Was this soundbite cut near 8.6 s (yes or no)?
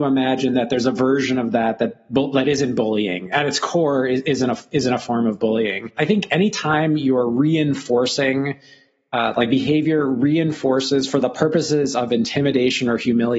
no